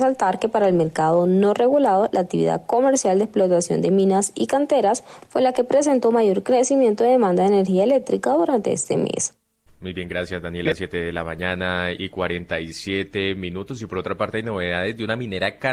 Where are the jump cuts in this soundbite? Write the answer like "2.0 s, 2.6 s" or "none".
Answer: none